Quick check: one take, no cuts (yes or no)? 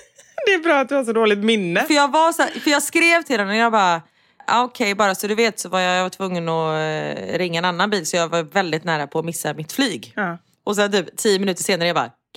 yes